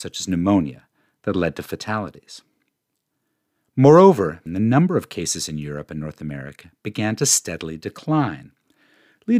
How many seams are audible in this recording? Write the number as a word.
one